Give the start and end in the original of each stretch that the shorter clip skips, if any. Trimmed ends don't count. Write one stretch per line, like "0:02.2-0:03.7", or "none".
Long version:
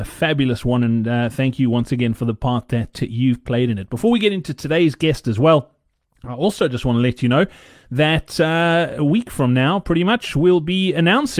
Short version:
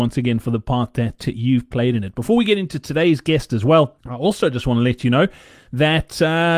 0:05.7-0:06.2